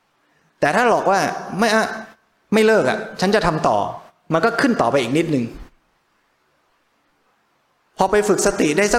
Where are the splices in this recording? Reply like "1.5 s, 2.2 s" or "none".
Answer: none